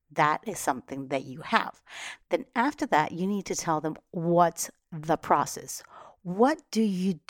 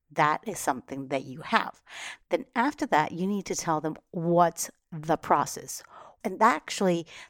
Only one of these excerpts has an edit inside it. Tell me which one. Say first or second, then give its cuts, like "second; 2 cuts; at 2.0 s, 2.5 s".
second; 1 cut; at 6.2 s